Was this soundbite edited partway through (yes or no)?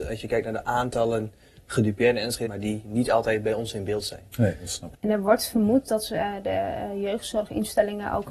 yes